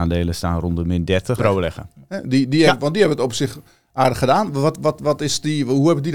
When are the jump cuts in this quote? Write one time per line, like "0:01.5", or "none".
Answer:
0:01.4